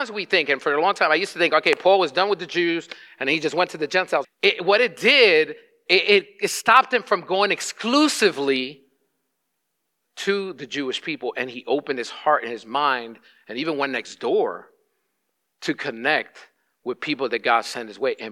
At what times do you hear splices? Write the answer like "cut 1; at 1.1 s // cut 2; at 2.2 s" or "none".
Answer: cut 1; at 4.2 s